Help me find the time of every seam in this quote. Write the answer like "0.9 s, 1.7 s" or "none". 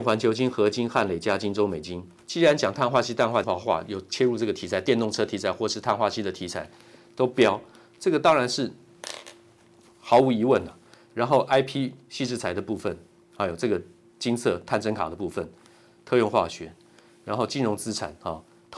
3.4 s